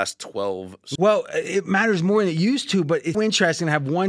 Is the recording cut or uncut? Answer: cut